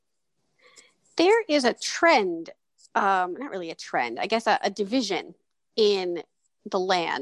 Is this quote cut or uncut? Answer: uncut